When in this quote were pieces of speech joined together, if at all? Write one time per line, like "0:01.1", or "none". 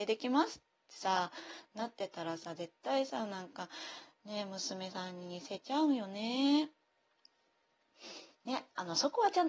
0:08.3